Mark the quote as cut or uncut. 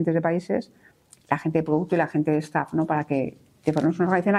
uncut